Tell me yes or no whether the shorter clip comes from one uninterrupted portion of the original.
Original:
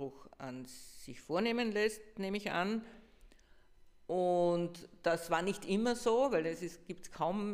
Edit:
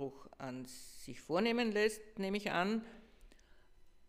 yes